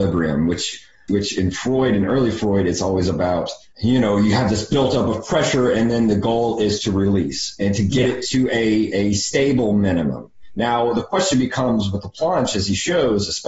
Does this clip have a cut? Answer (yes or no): no